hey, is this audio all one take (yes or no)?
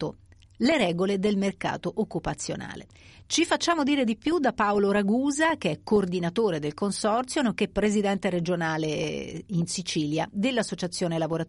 yes